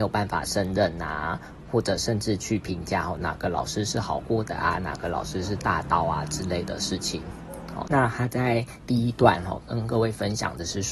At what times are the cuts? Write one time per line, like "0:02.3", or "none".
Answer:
0:07.9